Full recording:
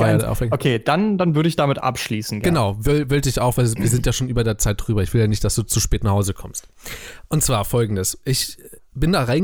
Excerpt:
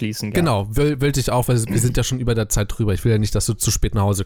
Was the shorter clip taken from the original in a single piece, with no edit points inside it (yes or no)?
yes